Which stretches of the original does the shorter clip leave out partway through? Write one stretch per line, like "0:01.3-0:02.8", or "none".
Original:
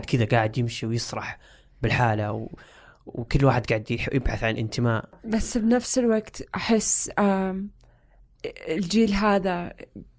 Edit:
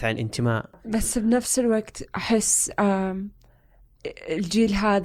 none